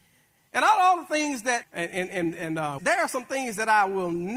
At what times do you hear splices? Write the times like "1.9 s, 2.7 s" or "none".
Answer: 1.6 s, 2.8 s